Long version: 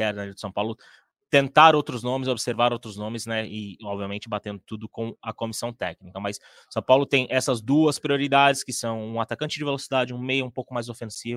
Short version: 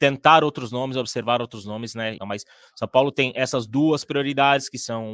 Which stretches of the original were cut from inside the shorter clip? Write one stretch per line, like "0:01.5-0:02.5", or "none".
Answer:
0:03.5-0:06.1